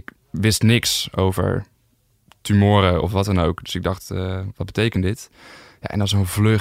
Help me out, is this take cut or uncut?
uncut